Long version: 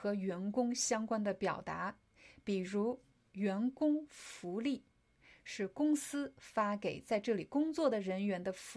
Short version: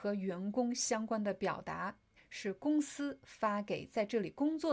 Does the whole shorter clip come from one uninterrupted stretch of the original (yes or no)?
no